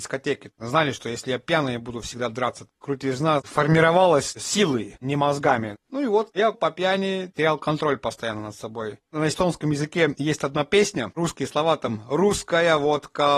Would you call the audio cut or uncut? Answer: uncut